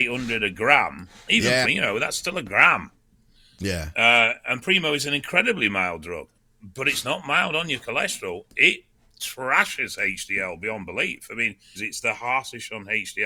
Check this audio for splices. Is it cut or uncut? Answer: cut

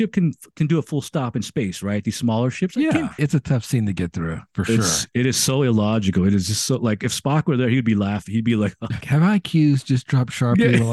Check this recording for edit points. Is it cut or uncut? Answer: cut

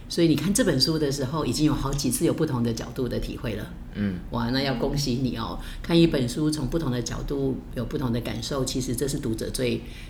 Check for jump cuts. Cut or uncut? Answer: uncut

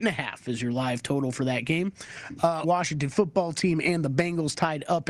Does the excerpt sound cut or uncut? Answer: cut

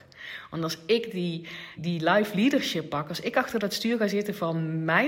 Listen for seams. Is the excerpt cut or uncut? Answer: cut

